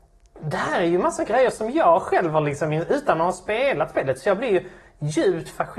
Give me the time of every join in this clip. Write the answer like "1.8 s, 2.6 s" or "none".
none